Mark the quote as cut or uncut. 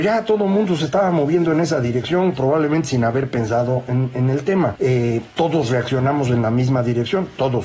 uncut